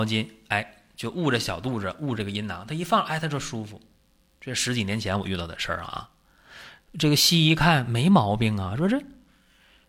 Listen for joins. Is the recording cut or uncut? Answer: uncut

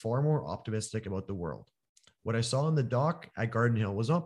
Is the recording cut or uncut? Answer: uncut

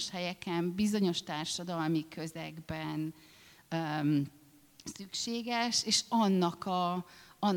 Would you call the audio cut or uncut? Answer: uncut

